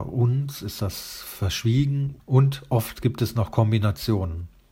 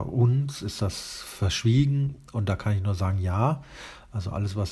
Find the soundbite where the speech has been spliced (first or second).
first